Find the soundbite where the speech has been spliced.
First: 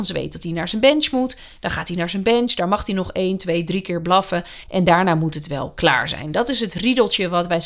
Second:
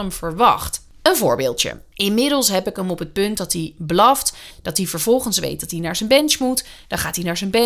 second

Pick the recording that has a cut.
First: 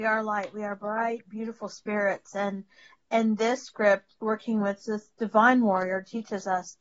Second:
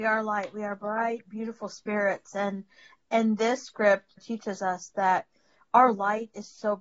second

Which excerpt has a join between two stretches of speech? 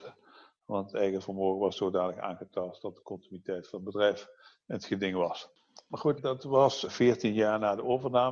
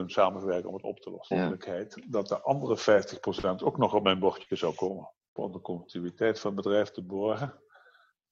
second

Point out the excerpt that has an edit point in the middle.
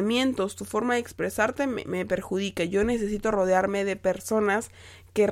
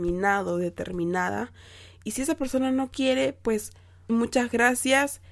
second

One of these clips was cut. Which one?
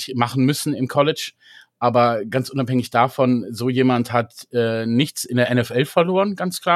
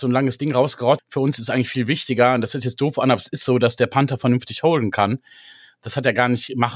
second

